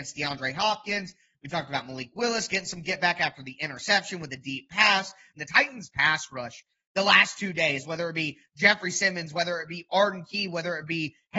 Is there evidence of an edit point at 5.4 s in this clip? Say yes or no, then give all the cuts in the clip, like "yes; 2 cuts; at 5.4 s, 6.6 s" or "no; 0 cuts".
yes; 1 cut; at 5.4 s